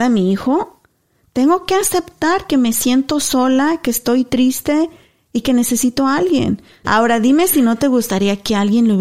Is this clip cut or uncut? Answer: cut